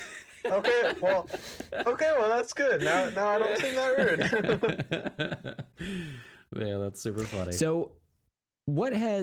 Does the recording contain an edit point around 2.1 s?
no; 0 cuts

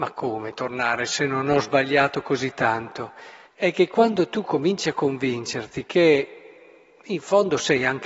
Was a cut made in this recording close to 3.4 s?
yes; 1 cut; at 3.4 s

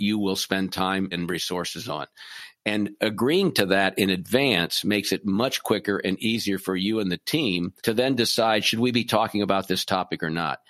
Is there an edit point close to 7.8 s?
yes; 2 cuts; at 1.1 s, 7.8 s

